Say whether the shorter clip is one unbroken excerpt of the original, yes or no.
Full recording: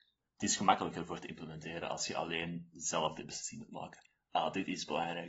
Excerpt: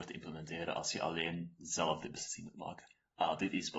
yes